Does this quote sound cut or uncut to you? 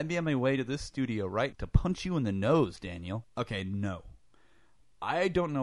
cut